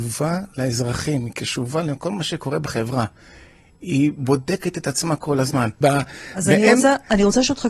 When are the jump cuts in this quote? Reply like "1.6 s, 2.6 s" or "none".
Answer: 5.8 s